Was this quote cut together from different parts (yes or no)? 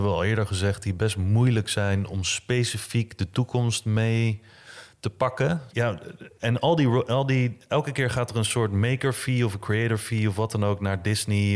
yes